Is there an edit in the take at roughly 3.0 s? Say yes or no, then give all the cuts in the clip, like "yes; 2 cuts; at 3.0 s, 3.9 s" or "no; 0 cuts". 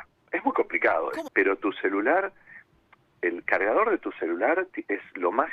no; 1 cut; at 1.3 s